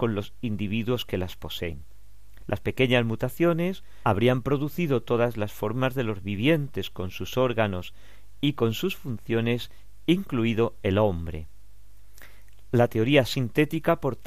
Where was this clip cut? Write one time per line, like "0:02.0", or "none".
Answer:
0:04.0